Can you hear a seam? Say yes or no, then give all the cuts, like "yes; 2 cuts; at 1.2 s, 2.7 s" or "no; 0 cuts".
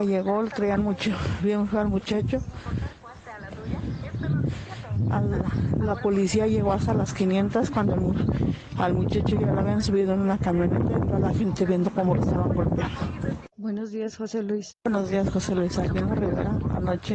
yes; 2 cuts; at 13.5 s, 14.7 s